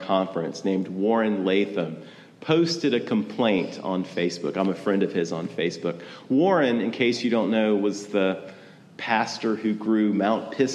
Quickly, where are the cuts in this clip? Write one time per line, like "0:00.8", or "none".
none